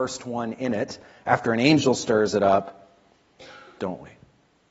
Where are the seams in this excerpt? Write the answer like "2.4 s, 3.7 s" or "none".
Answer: 3.8 s